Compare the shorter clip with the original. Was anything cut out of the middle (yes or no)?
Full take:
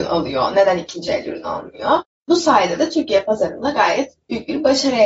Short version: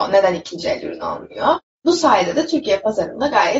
no